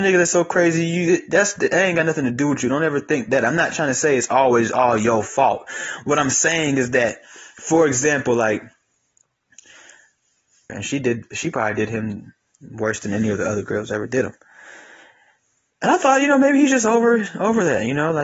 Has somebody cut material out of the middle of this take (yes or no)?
yes